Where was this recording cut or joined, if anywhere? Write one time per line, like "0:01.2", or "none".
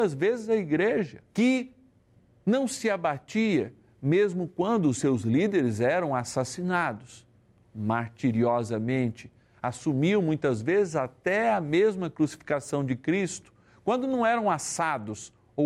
0:01.3